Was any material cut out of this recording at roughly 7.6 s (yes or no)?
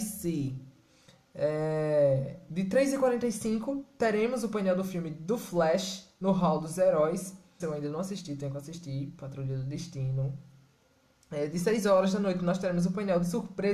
yes